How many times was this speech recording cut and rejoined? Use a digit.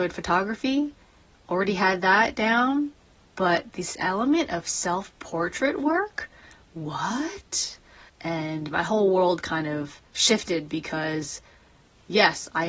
2